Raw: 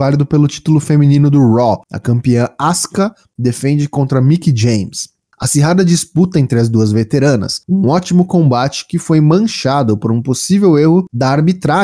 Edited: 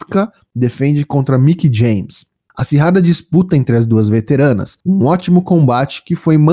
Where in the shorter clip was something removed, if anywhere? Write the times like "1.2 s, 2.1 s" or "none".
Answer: none